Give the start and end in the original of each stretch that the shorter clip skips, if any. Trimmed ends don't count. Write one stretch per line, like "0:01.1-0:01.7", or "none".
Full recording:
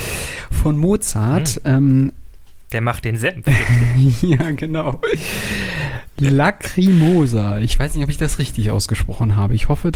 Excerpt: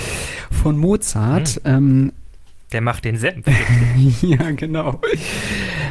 none